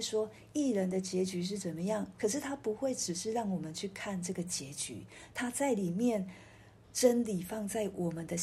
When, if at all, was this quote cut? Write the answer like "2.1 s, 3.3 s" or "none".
2.1 s, 6.8 s